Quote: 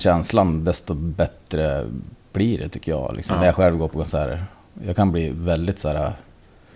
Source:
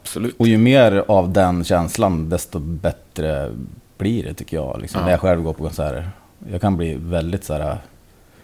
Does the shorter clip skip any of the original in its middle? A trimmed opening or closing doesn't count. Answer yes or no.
no